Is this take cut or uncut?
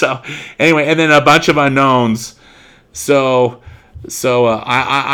uncut